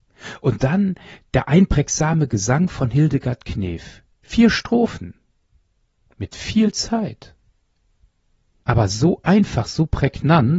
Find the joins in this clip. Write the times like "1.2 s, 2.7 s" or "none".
8.6 s